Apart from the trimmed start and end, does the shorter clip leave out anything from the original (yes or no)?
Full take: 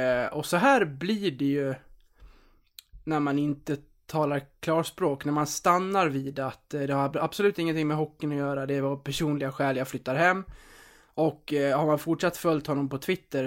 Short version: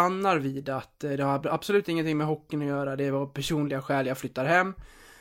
no